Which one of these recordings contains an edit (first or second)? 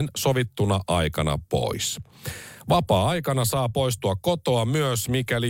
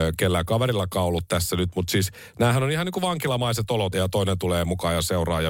second